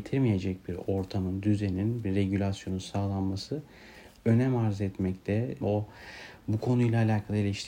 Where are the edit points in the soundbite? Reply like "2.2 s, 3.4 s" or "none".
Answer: 5.6 s

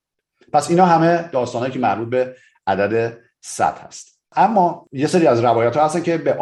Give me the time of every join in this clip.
4.2 s

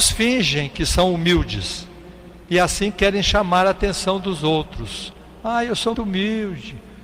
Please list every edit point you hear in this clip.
5.9 s

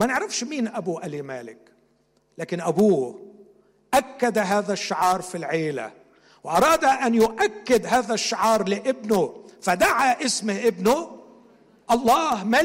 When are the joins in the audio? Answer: none

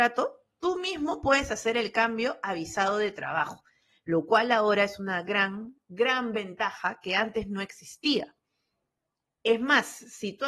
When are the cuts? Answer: none

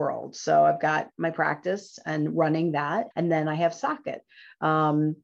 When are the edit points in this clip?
3.1 s

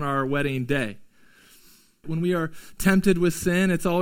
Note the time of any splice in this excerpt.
2.0 s

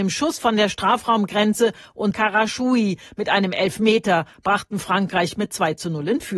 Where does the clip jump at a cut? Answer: none

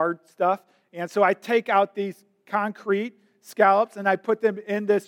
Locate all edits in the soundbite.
none

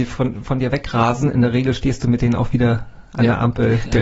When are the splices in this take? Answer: none

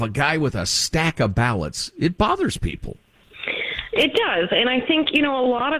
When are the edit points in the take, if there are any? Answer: none

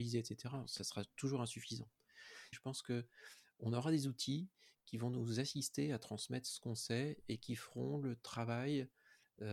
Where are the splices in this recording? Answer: 2.5 s

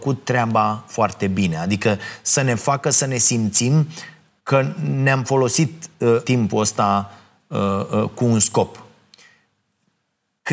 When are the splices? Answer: 6.2 s

